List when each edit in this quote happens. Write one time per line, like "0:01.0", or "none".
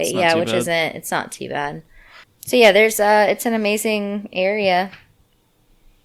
0:02.2

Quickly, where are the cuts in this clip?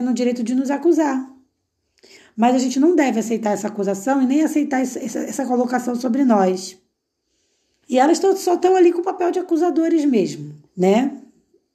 0:07.8
0:10.7

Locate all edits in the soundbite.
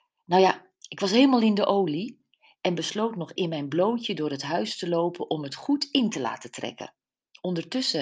0:03.4

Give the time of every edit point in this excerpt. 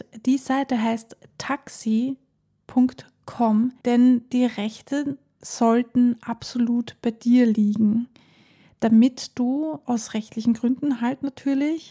0:03.8

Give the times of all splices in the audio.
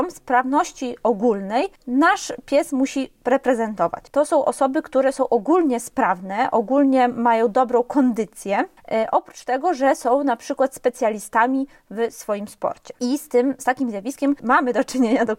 0:04.1

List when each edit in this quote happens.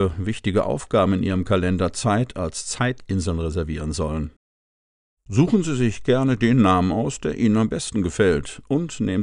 0:05.2

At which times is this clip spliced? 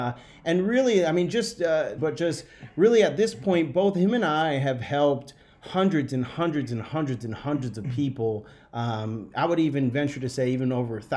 0:02.0

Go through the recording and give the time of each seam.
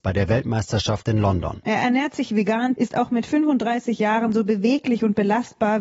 0:01.6
0:02.7

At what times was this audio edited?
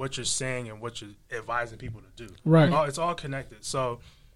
0:02.7

